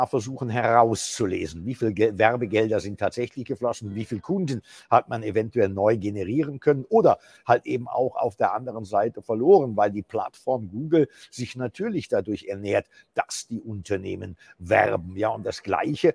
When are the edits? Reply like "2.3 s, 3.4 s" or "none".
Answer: none